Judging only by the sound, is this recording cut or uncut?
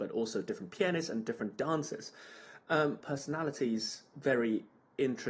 cut